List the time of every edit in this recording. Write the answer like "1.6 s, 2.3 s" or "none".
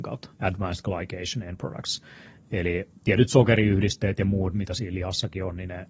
none